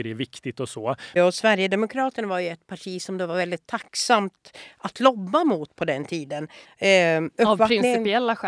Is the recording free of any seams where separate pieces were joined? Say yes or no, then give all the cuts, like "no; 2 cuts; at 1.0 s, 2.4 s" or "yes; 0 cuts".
no; 2 cuts; at 1.2 s, 6.6 s